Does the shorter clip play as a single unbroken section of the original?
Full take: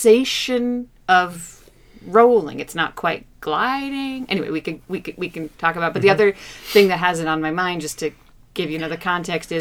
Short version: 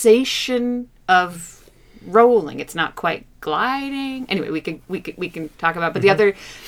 yes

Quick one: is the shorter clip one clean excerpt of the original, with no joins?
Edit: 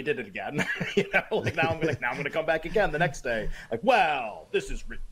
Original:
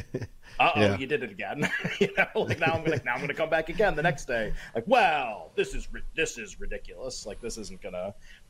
yes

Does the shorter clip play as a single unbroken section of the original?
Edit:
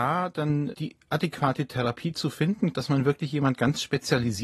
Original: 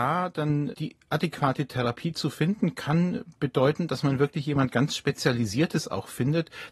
no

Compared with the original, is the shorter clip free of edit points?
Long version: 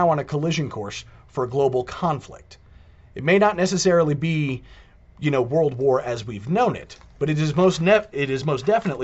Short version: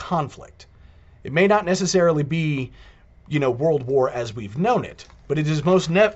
yes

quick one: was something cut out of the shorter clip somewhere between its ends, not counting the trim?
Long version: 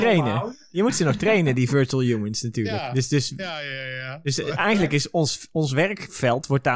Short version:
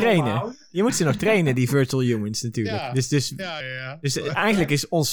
yes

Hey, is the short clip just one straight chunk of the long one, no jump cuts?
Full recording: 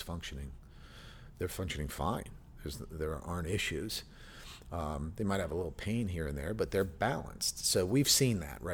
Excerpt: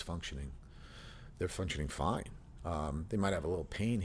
no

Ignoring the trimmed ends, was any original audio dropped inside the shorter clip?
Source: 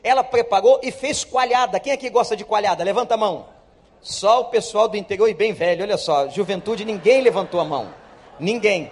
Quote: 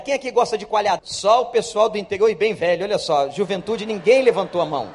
yes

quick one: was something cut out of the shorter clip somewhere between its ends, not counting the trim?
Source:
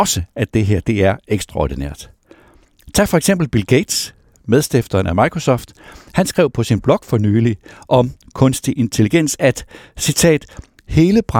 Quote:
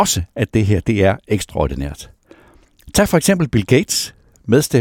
no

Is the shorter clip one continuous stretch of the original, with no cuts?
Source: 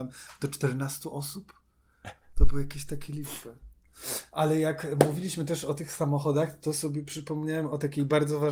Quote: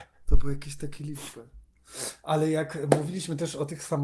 yes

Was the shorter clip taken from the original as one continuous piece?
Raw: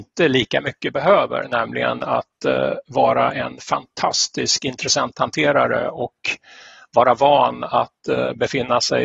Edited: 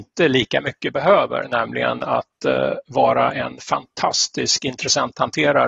yes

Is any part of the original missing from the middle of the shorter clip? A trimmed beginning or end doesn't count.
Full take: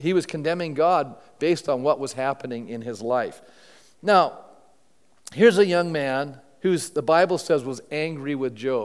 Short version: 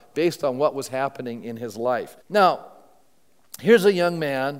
yes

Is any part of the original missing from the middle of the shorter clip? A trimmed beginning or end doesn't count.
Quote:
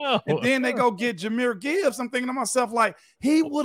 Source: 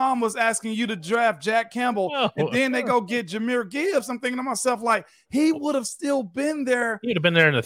no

